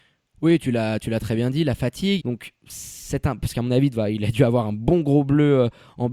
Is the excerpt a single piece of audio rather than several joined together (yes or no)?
no